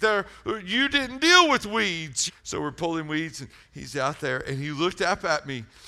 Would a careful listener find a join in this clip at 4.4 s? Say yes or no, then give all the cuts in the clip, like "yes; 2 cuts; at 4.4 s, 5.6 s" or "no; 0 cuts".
no; 1 cut; at 2.3 s